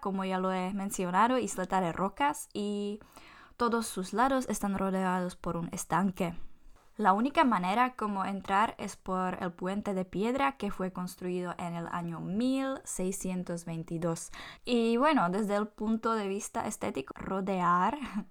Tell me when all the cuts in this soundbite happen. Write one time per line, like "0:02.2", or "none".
0:14.6
0:17.1

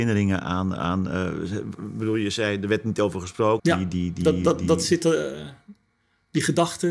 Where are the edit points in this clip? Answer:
0:03.6

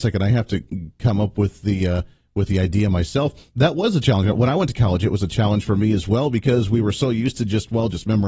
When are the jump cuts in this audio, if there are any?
none

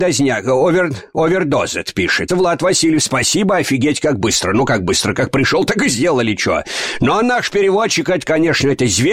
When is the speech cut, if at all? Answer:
0:02.3

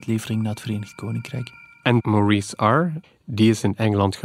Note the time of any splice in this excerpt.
0:03.0

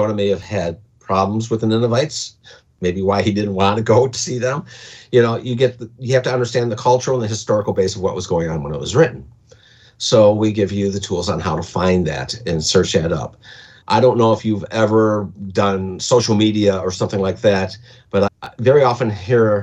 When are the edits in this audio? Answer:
0:13.8
0:18.3

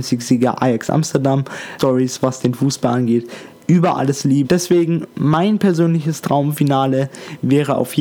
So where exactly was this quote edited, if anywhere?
0:01.8
0:04.4

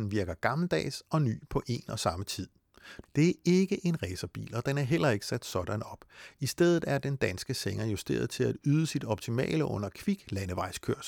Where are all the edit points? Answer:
0:03.0

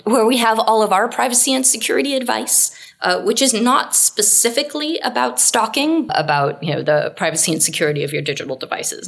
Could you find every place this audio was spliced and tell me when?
0:06.1

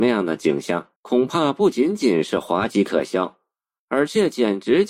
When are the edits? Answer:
0:01.0

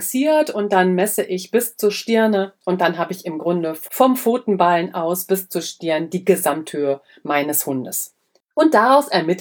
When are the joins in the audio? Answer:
0:08.4

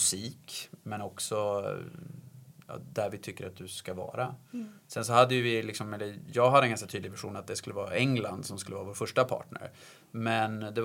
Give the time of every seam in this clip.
none

